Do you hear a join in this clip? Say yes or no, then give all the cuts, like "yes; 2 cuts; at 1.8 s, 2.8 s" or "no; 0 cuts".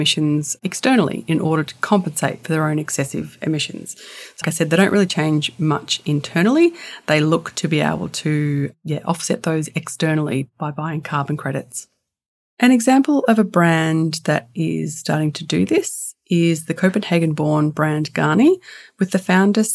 yes; 1 cut; at 4.4 s